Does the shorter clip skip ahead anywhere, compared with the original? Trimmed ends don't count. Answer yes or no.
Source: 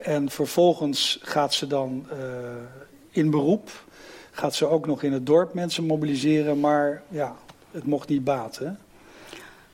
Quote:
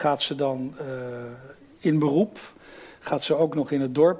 no